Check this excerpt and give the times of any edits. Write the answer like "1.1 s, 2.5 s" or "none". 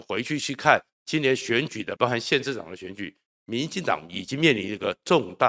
2.0 s